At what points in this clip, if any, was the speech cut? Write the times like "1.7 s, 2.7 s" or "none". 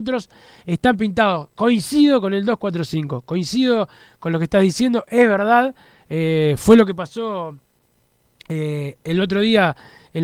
none